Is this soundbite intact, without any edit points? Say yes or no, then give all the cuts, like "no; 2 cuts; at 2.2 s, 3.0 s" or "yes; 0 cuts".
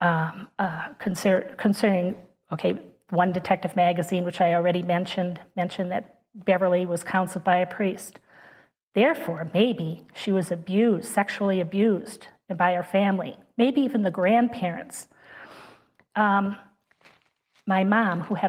yes; 0 cuts